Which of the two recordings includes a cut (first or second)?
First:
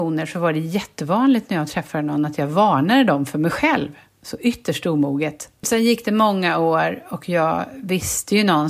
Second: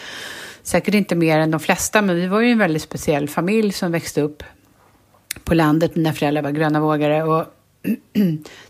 first